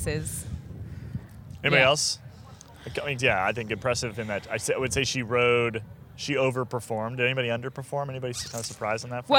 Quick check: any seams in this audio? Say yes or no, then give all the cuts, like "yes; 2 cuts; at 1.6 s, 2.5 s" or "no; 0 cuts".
yes; 1 cut; at 3.2 s